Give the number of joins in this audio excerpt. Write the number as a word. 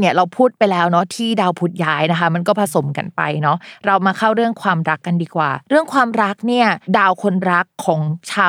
one